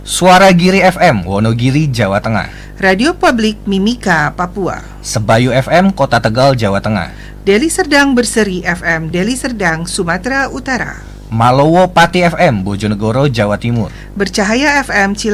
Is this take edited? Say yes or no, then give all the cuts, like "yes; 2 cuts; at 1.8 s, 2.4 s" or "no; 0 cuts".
no; 0 cuts